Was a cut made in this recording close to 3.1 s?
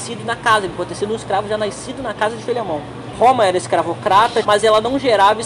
yes; 2 cuts; at 3.1 s, 4.4 s

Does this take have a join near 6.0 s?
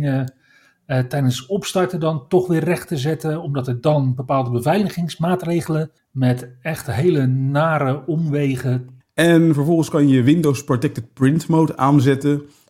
yes; 2 cuts; at 6.0 s, 9.0 s

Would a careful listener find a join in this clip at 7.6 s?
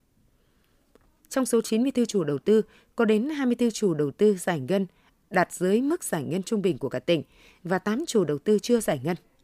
no; 1 cut; at 1.2 s

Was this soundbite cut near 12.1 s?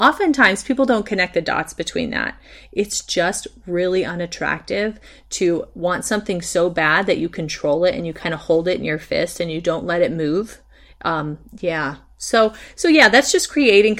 no; 0 cuts

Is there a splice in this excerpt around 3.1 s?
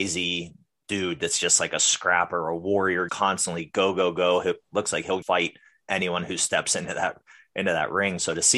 yes; 2 cuts; at 3.1 s, 5.2 s

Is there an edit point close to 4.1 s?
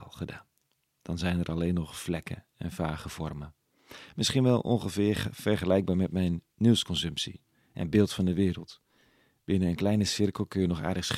no; 0 cuts

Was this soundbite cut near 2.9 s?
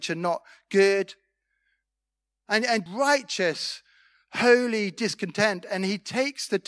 yes; 1 cut; at 2.9 s

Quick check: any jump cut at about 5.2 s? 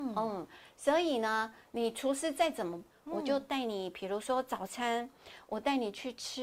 no; 2 cuts; at 1.6 s, 2.9 s

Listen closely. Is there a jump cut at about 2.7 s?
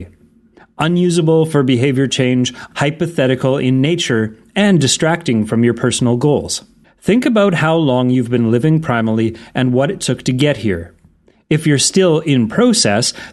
yes; 2 cuts; at 2.7 s, 6.8 s

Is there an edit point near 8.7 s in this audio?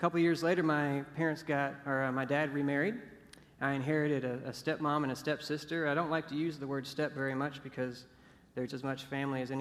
yes; 1 cut; at 8.7 s

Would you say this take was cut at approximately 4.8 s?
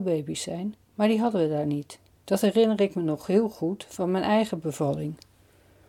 no; 1 cut; at 2.2 s

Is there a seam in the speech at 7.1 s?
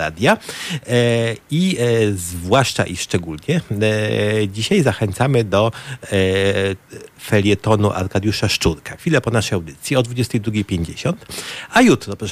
yes; 2 cuts; at 7.1 s, 9.0 s

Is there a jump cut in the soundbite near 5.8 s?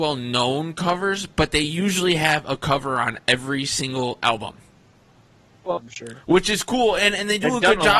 yes; 1 cut; at 5.8 s

